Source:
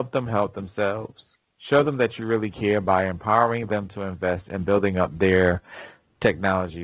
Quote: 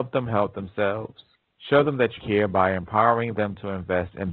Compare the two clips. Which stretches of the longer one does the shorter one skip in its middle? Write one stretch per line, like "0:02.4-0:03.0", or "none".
0:02.2-0:02.5